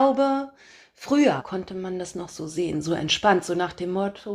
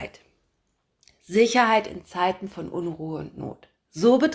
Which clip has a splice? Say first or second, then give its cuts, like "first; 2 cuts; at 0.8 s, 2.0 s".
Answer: first; 1 cut; at 1.4 s